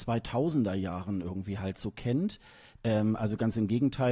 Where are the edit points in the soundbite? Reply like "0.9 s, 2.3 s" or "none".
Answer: 2.8 s